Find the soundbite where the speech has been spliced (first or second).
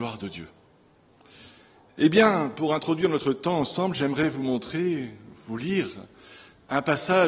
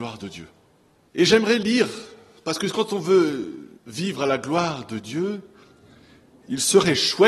second